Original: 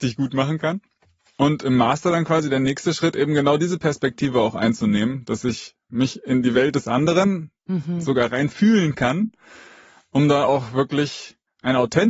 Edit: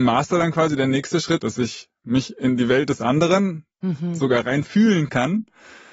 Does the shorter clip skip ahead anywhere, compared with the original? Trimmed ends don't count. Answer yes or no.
yes